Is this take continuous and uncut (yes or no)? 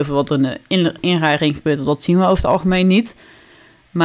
yes